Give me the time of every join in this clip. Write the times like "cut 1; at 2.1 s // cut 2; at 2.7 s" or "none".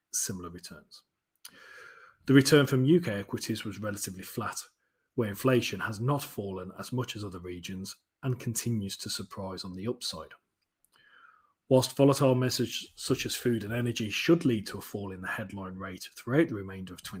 none

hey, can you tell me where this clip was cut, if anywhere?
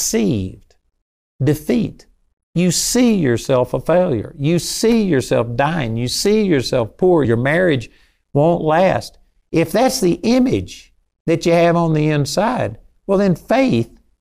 cut 1; at 7.2 s

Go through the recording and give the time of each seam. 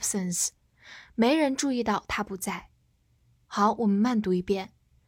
none

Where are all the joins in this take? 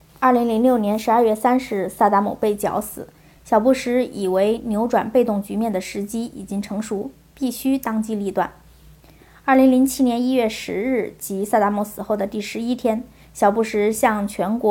none

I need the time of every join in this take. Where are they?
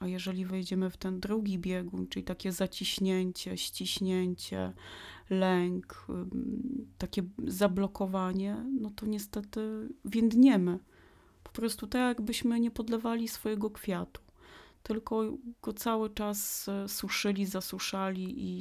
none

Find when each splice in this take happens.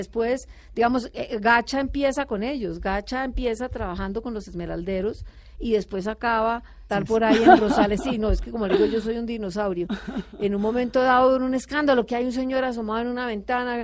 cut 1; at 6.9 s

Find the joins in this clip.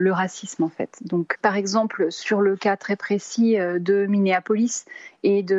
cut 1; at 1.3 s

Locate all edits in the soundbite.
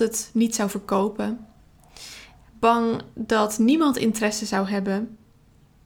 none

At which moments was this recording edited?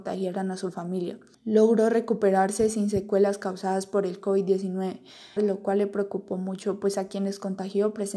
cut 1; at 1.3 s // cut 2; at 5.4 s

